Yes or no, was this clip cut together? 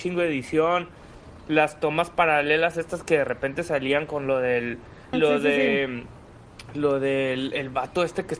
yes